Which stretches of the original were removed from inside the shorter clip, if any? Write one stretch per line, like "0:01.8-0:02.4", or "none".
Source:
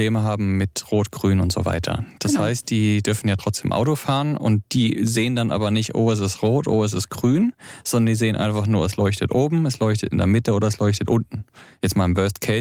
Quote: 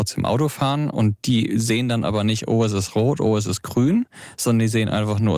none